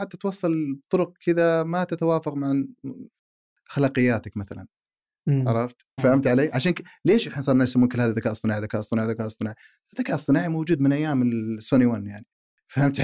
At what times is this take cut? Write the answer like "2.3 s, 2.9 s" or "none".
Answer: 6.0 s